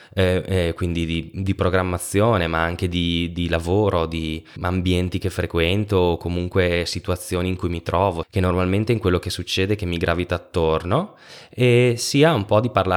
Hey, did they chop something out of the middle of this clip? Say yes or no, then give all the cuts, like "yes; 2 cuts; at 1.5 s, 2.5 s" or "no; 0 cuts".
yes; 2 cuts; at 4.6 s, 8.2 s